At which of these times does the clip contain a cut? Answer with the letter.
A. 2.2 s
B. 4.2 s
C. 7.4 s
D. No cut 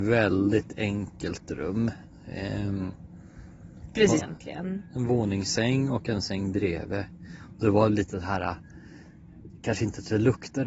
B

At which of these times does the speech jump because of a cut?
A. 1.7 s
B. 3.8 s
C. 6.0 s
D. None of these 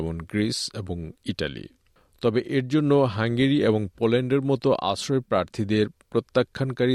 D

